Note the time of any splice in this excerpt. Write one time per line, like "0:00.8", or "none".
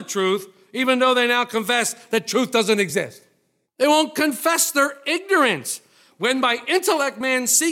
0:03.6

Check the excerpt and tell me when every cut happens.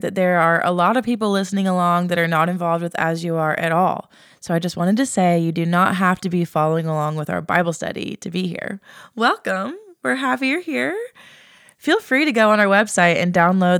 none

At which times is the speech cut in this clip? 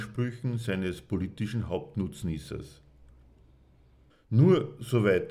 0:04.1

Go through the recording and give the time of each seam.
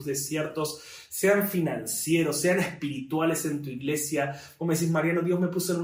none

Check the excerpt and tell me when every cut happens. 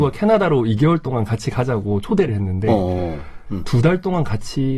0:03.5

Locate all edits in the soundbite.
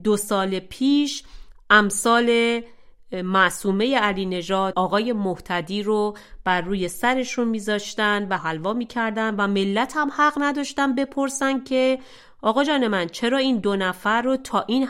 0:04.7
0:08.4

